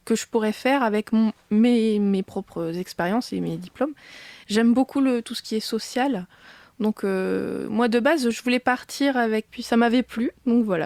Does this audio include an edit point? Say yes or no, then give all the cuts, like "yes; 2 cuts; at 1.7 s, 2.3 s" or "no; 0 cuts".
yes; 2 cuts; at 4.4 s, 9.5 s